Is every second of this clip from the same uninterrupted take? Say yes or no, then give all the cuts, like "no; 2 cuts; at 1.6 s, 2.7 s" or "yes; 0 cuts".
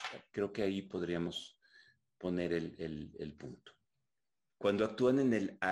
no; 1 cut; at 4.6 s